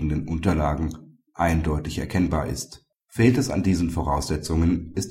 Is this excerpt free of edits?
yes; 0 cuts

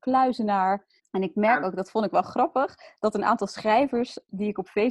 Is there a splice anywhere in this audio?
yes; 1 cut; at 1.0 s

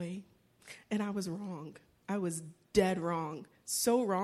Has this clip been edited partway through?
no; 0 cuts

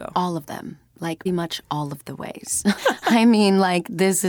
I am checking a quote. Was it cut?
yes; 2 cuts; at 1.3 s, 2.8 s

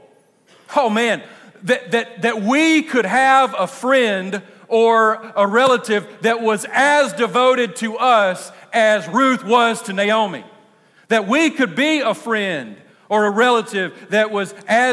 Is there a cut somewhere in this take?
no; 0 cuts

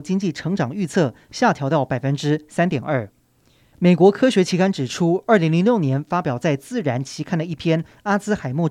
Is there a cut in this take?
no; 0 cuts

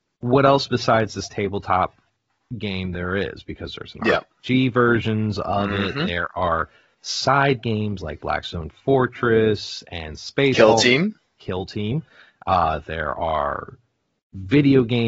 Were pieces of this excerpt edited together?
no; 0 cuts

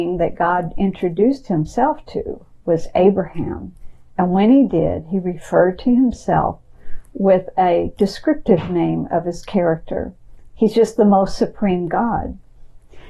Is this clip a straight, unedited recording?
no; 1 cut; at 10.5 s

